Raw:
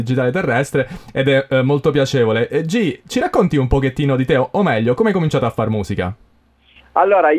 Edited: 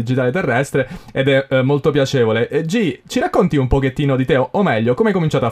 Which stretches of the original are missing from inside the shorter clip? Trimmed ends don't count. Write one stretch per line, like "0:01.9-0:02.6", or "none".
none